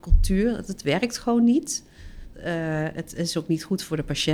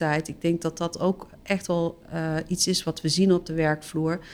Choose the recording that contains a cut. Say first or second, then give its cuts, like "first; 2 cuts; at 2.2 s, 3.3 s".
first; 1 cut; at 2.3 s